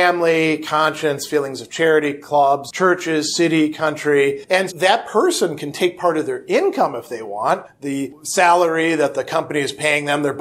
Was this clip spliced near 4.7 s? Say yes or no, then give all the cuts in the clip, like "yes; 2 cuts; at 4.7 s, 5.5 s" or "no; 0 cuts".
yes; 1 cut; at 4.7 s